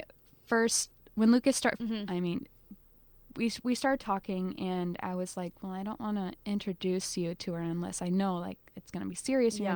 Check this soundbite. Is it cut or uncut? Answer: cut